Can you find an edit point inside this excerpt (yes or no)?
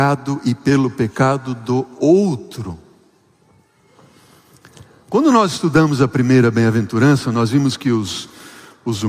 no